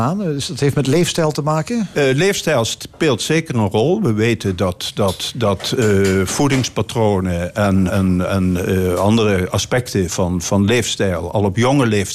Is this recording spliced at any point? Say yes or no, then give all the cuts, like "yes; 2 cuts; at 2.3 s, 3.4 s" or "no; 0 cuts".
yes; 2 cuts; at 7.9 s, 10.1 s